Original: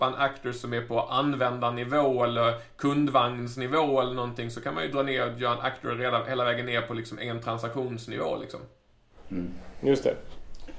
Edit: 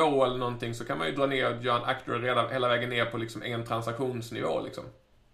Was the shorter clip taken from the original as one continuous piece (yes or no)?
yes